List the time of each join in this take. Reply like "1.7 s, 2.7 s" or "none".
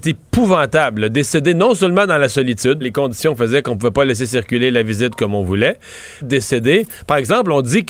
2.8 s, 6.2 s